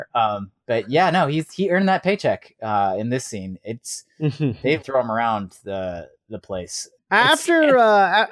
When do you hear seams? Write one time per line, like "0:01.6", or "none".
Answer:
0:04.8
0:07.0